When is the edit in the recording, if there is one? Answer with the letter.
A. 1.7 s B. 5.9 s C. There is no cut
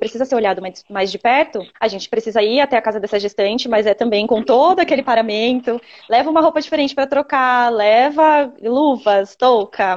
A